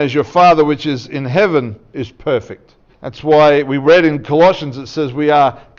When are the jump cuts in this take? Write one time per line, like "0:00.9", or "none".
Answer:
0:02.9

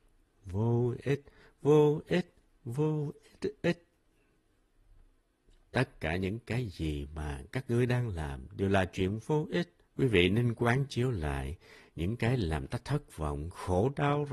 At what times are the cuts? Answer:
0:05.6
0:09.8

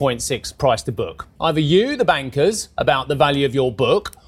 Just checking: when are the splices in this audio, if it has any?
0:01.4

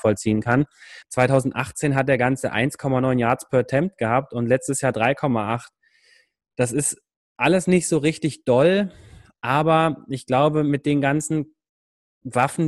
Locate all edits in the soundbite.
0:01.0

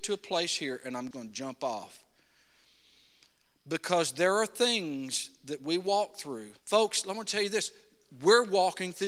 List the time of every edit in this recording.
0:01.1
0:06.6

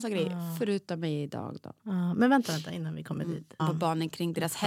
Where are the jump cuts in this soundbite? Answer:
0:03.6

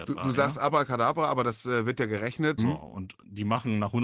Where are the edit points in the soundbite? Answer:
0:02.6

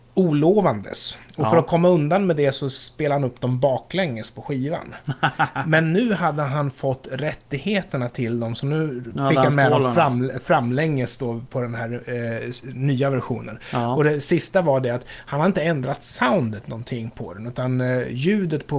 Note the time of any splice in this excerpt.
none

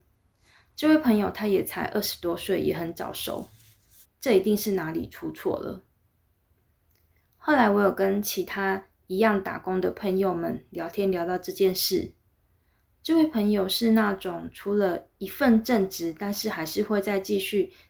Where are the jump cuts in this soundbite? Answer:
0:04.0

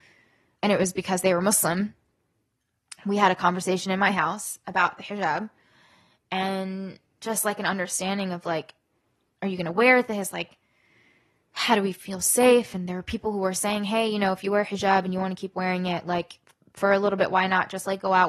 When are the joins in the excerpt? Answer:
none

